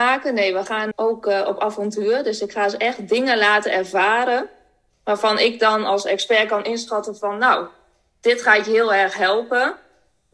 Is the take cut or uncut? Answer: cut